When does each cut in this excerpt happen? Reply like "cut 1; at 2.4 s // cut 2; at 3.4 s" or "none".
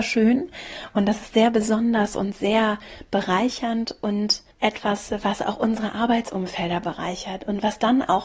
cut 1; at 4.5 s